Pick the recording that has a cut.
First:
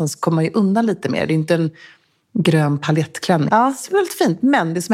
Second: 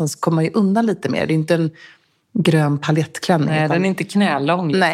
first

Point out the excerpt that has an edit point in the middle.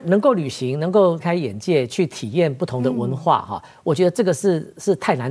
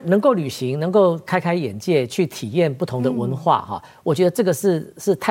first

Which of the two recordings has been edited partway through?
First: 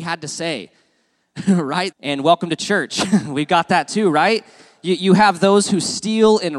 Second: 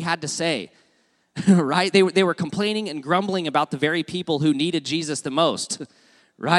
first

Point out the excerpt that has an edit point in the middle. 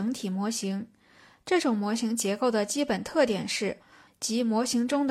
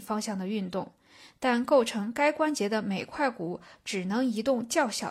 first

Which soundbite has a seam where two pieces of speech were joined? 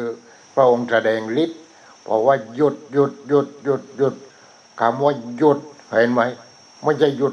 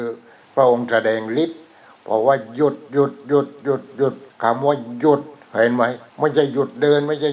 second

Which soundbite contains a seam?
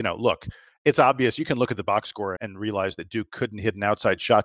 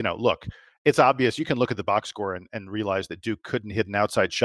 first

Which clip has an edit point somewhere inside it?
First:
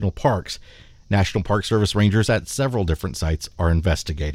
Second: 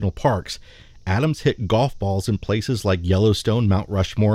first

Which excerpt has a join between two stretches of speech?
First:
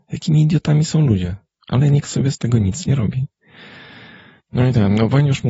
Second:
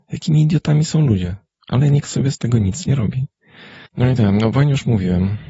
second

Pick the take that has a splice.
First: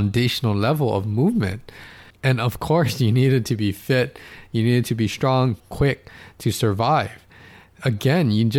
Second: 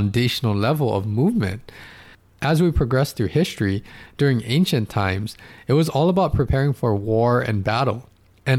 first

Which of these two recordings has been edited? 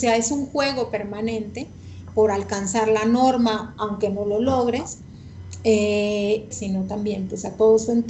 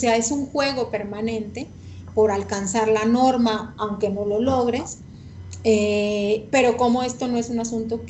first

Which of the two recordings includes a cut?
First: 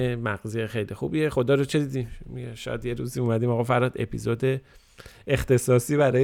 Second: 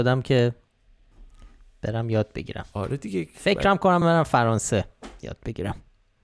second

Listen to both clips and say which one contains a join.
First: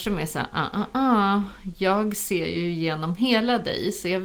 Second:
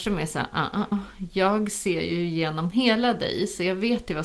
second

